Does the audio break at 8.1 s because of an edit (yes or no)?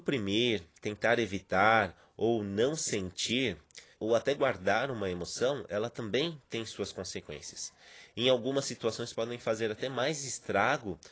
no